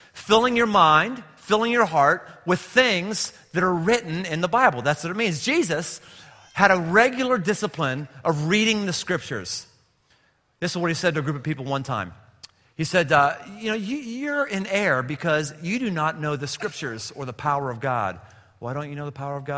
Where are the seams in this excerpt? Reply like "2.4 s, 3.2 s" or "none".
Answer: none